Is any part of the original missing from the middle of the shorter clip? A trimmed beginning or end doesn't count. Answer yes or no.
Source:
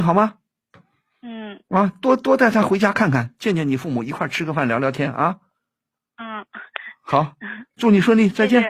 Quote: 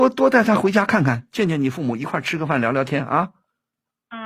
no